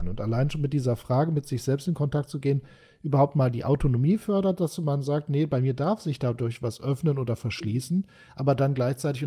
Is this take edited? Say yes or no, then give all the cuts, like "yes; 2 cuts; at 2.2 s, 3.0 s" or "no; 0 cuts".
no; 0 cuts